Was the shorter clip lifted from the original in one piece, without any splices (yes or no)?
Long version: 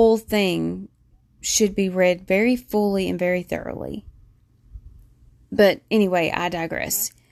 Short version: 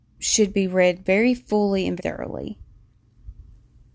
no